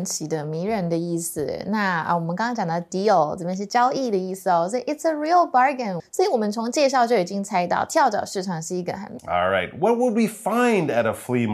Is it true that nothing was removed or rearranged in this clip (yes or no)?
no